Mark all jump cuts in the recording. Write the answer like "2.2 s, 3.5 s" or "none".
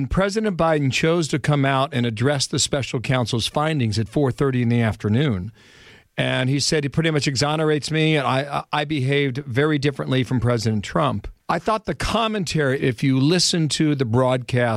11.4 s, 12.8 s